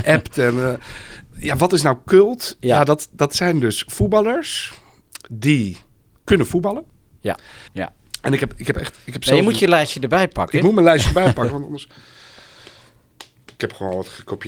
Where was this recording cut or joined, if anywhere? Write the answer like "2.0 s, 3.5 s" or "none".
7.7 s